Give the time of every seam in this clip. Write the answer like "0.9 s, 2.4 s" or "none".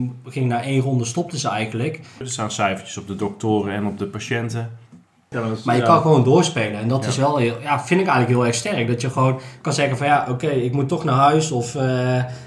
2.2 s, 5.3 s